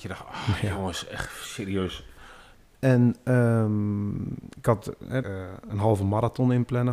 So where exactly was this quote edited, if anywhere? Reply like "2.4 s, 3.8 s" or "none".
2.7 s, 5.2 s